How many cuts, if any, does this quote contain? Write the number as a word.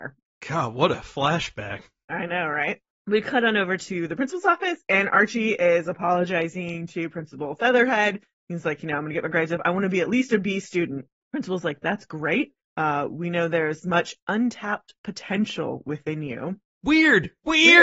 zero